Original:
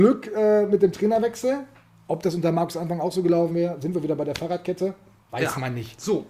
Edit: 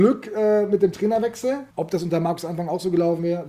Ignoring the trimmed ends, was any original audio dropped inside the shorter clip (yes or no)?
yes